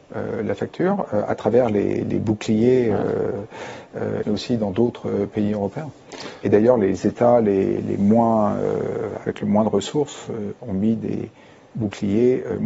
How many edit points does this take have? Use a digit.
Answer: 1